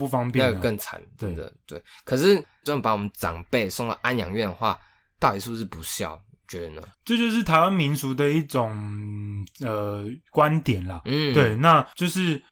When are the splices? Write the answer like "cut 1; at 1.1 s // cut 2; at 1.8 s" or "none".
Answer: cut 1; at 6.9 s